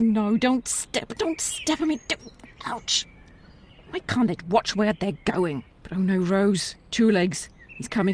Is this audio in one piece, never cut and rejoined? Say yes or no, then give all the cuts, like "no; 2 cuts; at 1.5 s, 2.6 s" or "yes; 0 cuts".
no; 2 cuts; at 4.4 s, 5.7 s